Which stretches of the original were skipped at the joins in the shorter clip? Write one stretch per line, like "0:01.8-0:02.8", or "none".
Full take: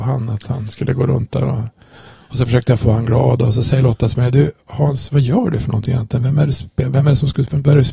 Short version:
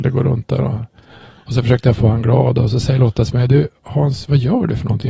none

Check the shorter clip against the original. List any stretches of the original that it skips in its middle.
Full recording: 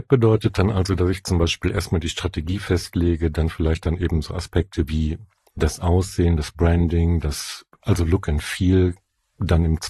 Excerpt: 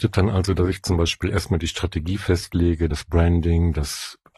0:03.3-0:06.4

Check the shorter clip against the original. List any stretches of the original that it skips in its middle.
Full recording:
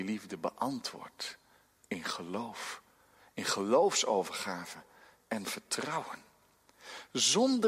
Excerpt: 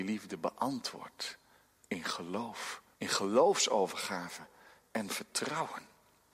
0:02.9-0:03.3

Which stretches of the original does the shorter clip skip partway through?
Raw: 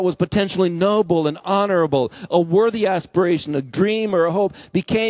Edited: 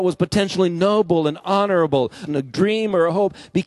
0:02.3-0:03.5

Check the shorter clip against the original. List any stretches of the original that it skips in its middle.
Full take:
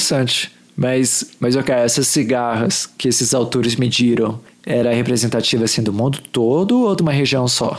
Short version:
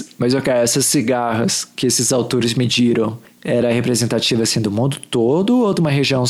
none

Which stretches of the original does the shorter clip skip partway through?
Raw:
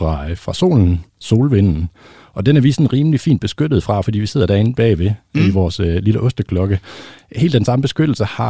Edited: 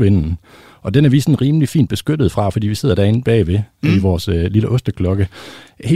none

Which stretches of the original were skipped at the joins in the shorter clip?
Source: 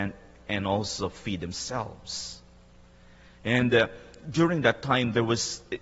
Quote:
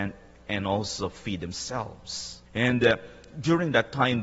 0:02.5-0:03.4

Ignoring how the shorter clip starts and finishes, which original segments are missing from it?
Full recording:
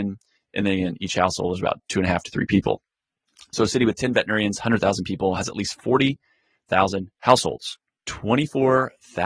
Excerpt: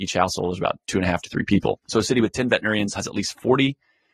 0:02.8-0:03.5
0:04.6-0:05.4

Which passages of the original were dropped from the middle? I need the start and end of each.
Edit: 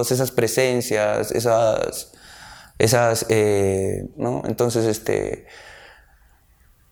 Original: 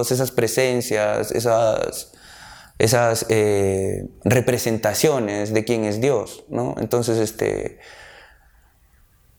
0:04.1-0:06.5

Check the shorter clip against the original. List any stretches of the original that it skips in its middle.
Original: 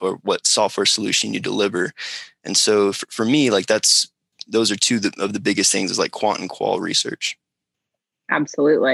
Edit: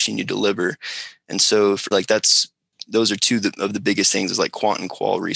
0:03.1-0:03.5

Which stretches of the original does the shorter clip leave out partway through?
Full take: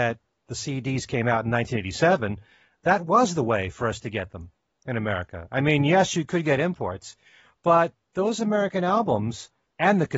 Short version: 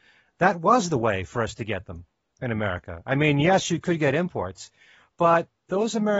none

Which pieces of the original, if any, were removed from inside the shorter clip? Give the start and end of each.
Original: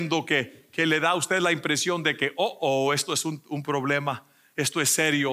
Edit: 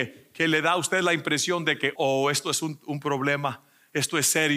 0:02.3-0:02.6

